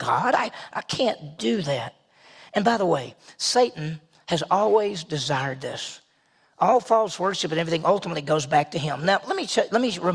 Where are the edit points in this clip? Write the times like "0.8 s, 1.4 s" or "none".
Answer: none

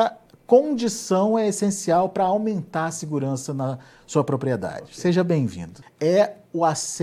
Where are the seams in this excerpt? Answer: 5.8 s

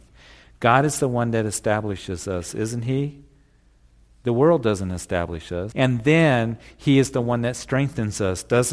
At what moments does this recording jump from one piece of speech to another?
5.7 s

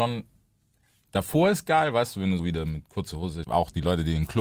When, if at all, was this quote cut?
2.4 s, 3.4 s

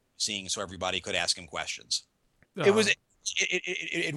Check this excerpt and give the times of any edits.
2.4 s

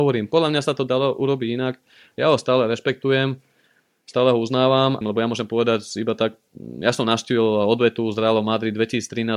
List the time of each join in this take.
5.0 s

